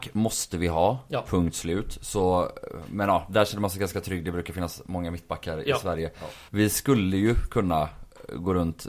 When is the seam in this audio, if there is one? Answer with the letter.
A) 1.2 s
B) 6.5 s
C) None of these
B